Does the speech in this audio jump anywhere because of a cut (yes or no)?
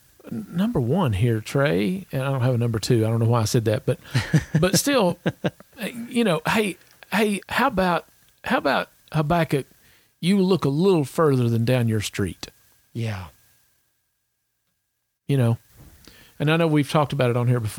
yes